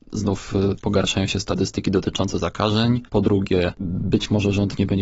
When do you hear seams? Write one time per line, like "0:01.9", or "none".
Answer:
none